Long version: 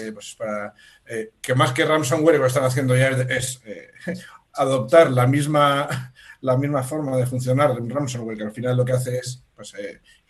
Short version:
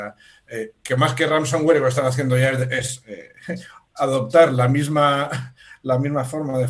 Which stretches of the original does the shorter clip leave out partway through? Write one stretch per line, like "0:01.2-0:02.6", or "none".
none